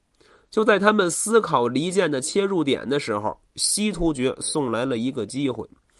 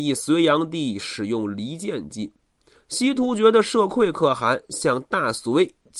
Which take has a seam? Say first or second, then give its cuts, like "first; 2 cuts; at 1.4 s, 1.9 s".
second; 1 cut; at 2.7 s